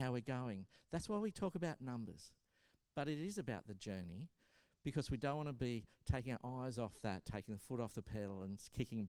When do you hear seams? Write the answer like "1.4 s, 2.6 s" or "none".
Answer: none

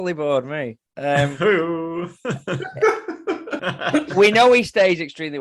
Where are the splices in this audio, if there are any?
3.6 s

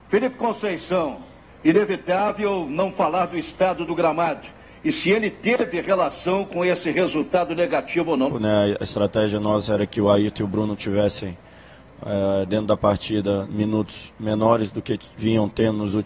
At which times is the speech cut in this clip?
1.5 s, 8.3 s

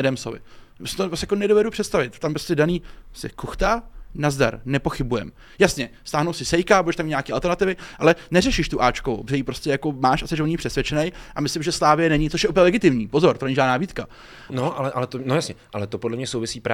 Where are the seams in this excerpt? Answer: 14.5 s

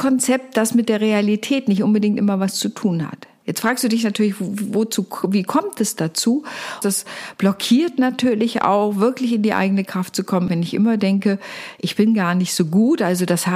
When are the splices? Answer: 6.8 s, 10.5 s

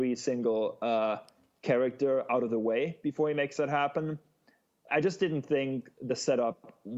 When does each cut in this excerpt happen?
4.9 s

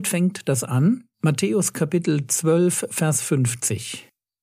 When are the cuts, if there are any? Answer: 1.1 s

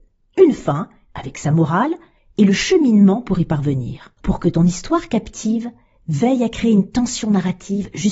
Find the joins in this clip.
4.2 s

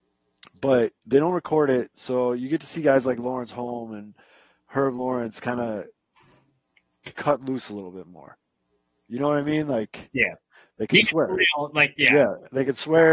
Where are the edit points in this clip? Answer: none

